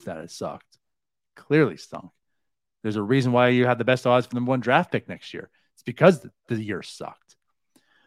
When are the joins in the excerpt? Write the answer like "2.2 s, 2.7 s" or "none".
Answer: none